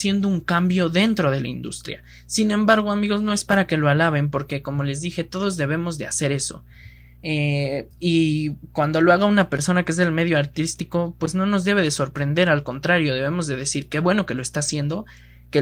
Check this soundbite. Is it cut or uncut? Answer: uncut